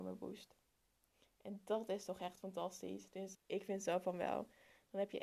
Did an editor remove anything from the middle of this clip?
yes; 1 cut; at 3.3 s

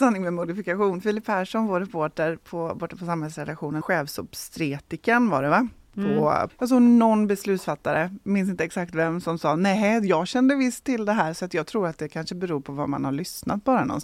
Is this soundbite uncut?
no; 2 cuts; at 3.8 s, 6.5 s

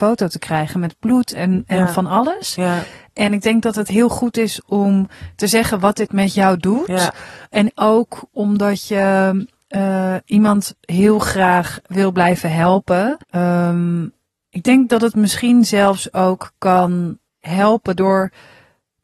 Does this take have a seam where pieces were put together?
yes; 2 cuts; at 13.2 s, 17.3 s

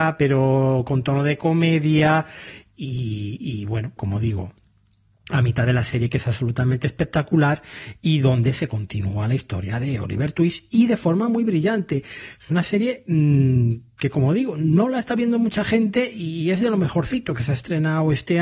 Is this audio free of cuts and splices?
no; 1 cut; at 4.0 s

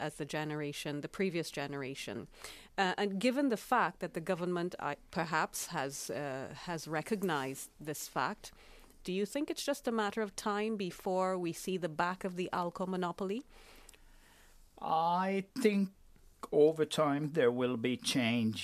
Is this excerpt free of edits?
no; 1 cut; at 9.0 s

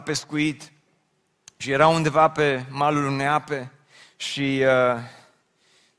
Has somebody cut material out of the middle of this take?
no; 0 cuts

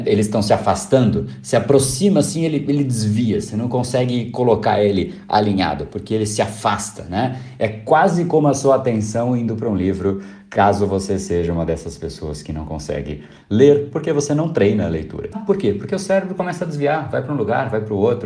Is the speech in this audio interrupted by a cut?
yes; 1 cut; at 15.3 s

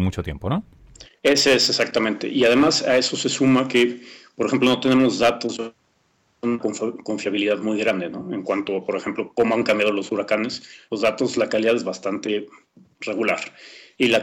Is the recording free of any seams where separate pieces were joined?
yes; 0 cuts

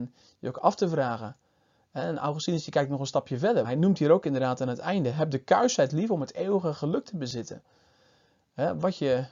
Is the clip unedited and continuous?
no; 1 cut; at 3.6 s

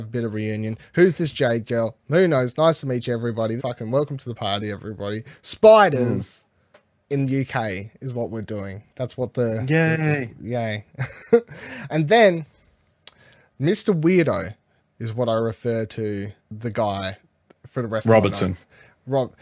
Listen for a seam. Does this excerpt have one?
yes; 3 cuts; at 3.6 s, 11.9 s, 16.4 s

